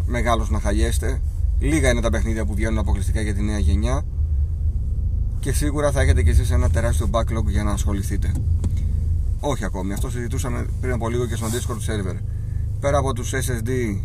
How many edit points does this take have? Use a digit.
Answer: 1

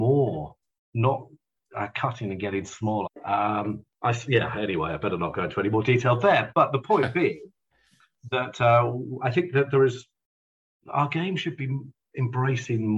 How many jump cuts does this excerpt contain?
2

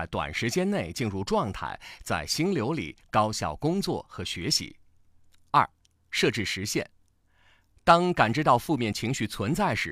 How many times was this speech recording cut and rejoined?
0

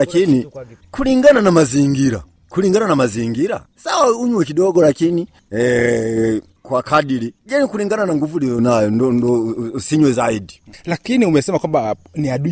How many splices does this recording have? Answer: 0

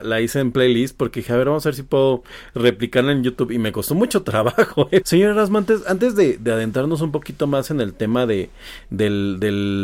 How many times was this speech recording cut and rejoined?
1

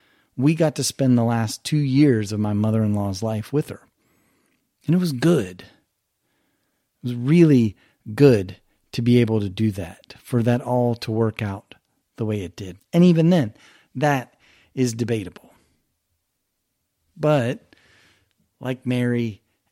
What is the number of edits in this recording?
1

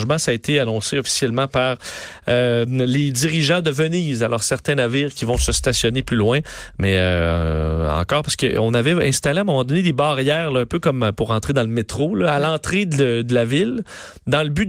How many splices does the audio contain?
0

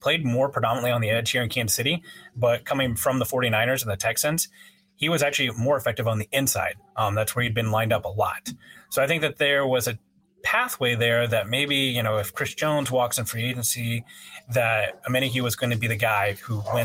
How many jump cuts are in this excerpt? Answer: 0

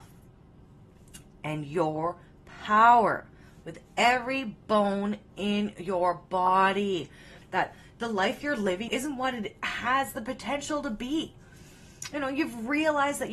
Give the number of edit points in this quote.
2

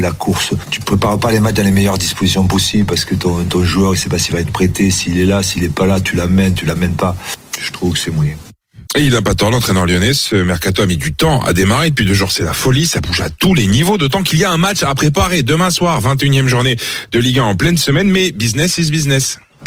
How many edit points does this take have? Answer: 1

